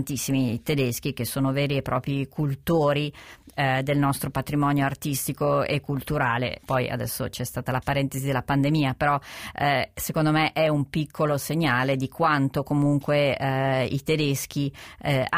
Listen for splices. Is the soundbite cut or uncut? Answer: cut